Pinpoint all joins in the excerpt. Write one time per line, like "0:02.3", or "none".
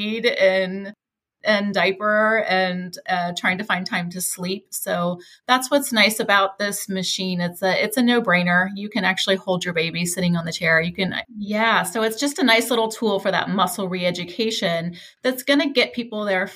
0:11.2